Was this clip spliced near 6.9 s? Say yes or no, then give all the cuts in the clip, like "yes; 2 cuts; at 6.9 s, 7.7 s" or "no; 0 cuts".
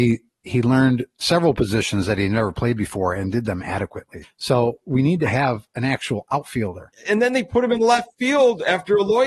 yes; 2 cuts; at 4.2 s, 6.9 s